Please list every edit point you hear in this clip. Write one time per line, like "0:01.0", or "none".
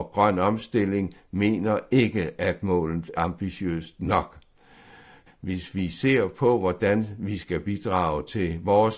0:03.2
0:05.3